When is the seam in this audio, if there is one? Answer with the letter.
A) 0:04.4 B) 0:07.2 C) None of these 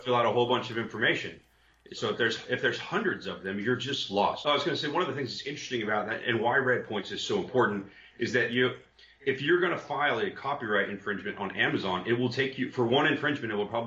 A